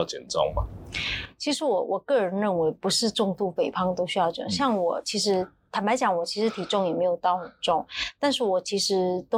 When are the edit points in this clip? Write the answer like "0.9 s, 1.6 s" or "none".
none